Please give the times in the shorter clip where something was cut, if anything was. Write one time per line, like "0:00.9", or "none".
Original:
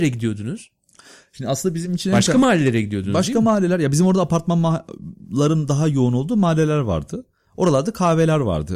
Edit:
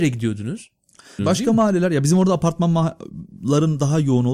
0:01.2